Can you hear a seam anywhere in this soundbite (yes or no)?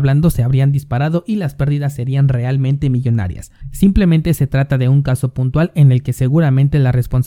no